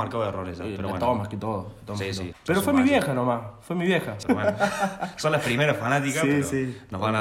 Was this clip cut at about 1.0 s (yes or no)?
no